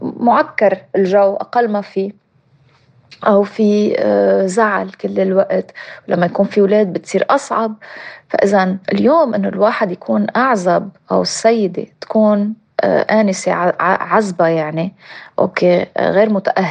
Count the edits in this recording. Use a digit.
1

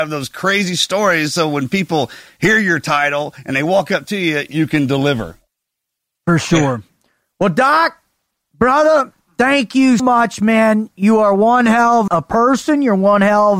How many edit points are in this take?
2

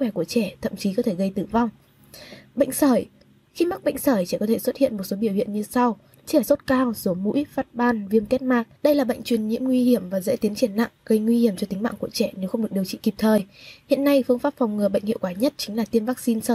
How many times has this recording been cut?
1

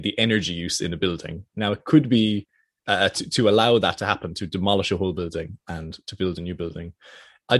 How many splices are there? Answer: 1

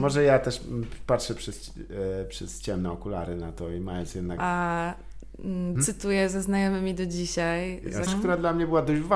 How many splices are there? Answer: 3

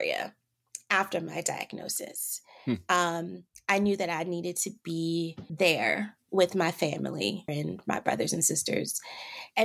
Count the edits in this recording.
1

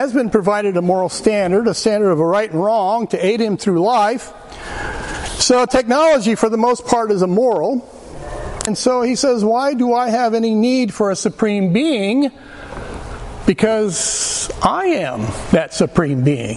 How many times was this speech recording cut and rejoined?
2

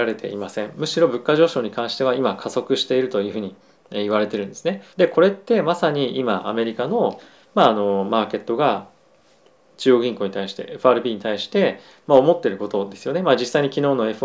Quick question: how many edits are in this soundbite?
1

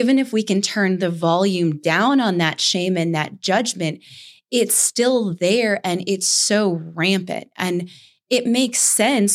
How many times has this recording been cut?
0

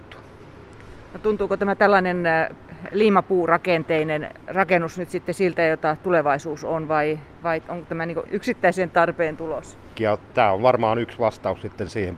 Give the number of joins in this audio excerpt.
1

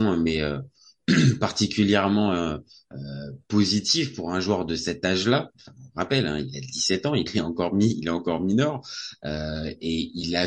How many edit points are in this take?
1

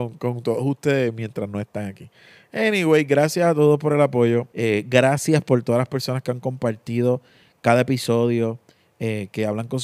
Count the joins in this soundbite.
1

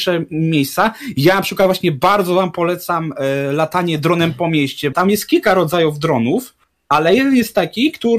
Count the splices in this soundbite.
1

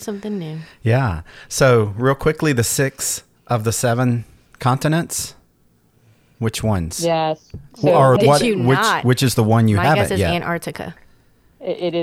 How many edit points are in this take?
1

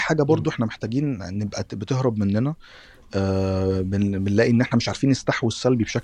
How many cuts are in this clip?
1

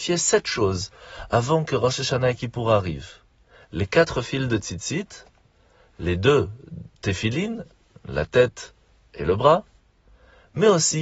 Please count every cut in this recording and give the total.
0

